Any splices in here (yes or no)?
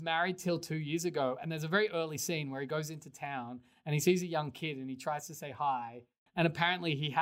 yes